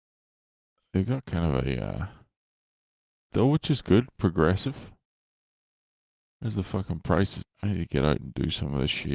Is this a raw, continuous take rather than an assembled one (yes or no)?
no